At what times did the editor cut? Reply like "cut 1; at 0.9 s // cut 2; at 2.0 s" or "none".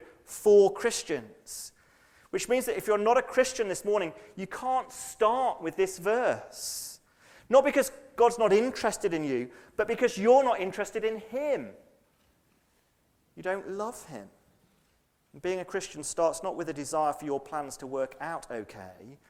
none